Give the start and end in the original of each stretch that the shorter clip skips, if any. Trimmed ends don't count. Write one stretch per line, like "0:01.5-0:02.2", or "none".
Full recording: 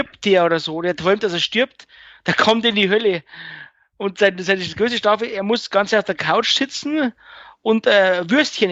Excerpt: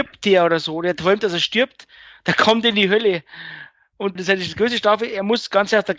0:04.2-0:04.4